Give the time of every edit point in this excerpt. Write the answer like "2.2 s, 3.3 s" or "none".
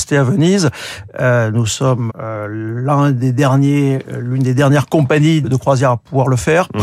2.1 s, 5.4 s